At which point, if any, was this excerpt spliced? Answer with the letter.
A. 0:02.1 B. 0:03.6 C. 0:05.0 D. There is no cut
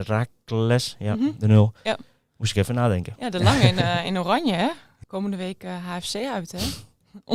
C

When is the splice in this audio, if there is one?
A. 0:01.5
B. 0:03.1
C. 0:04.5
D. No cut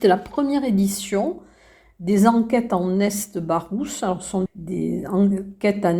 C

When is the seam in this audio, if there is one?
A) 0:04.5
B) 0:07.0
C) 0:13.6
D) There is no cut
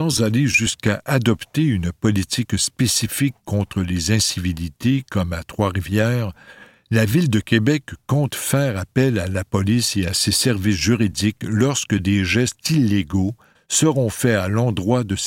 C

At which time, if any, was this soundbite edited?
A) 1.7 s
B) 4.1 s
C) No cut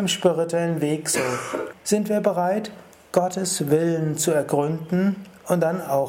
A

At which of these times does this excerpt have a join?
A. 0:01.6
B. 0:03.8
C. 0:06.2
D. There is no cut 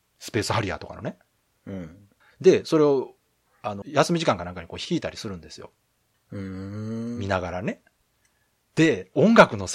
B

